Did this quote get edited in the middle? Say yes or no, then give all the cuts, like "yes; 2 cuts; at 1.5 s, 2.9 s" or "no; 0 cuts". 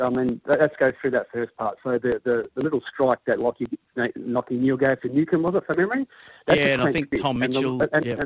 no; 0 cuts